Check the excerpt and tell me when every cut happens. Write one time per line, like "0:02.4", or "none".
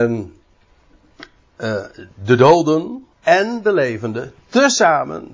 0:03.1